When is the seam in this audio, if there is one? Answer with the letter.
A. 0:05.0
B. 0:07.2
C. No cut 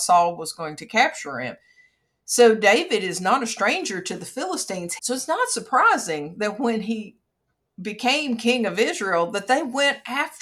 A